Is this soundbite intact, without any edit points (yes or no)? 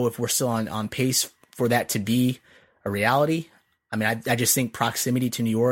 yes